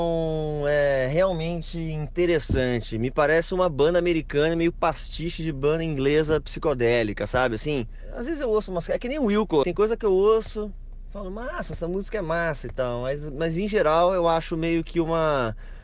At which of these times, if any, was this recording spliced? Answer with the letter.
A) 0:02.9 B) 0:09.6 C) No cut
B